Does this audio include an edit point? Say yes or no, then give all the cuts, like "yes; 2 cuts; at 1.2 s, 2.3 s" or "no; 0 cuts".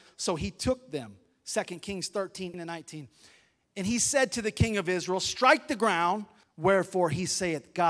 yes; 2 cuts; at 2.5 s, 6.4 s